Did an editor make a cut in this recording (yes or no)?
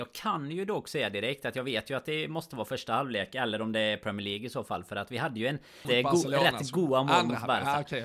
yes